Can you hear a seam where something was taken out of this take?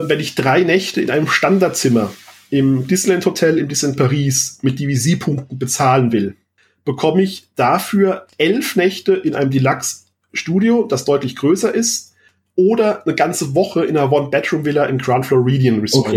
no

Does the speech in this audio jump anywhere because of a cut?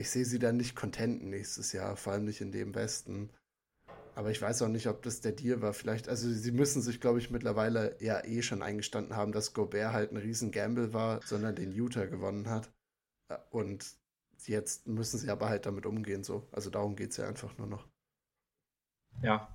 yes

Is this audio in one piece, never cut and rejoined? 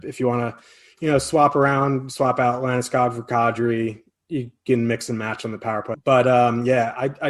no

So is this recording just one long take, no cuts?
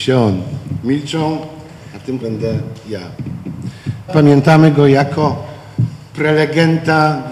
no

